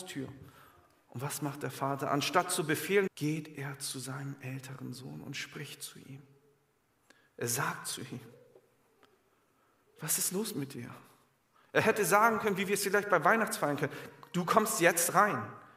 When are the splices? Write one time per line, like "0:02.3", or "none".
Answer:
0:03.1